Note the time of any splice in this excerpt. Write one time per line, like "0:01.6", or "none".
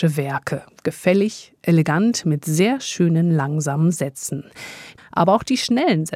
0:05.0

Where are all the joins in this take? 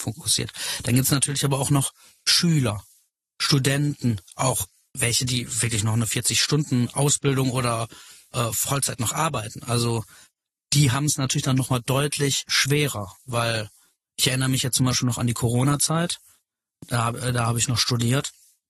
none

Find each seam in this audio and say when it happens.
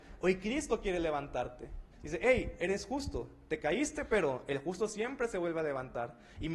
0:01.9

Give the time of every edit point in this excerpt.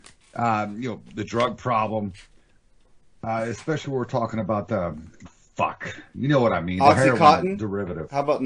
0:05.2

